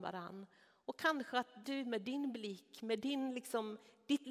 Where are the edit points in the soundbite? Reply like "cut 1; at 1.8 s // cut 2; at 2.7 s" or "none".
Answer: cut 1; at 1.6 s

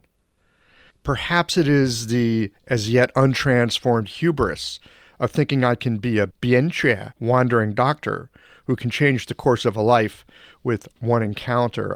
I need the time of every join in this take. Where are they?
cut 1; at 0.9 s // cut 2; at 7.1 s

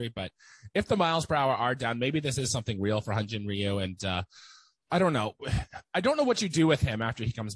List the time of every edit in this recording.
none

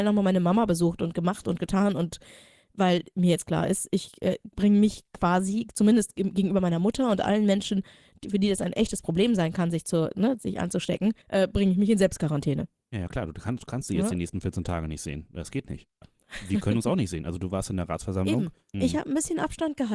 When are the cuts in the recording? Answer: cut 1; at 11.2 s // cut 2; at 16.0 s // cut 3; at 18.7 s

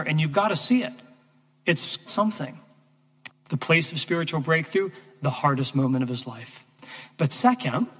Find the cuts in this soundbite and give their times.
cut 1; at 2.1 s // cut 2; at 3.3 s

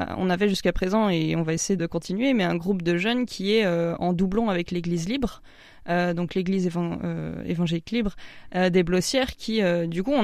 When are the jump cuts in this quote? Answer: cut 1; at 1.8 s

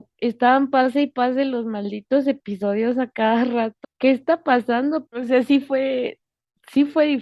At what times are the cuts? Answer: cut 1; at 3.8 s // cut 2; at 5.1 s

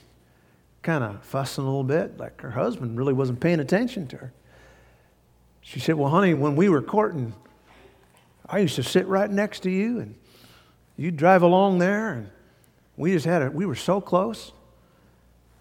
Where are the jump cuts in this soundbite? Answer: none

